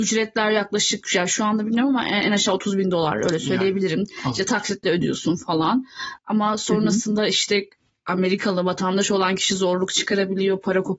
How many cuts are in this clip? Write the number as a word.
zero